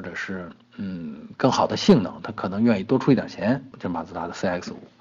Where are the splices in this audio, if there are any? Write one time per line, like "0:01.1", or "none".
0:03.7